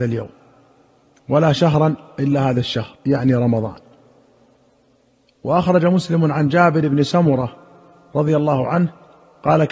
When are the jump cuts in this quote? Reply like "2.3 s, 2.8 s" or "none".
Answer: 3.0 s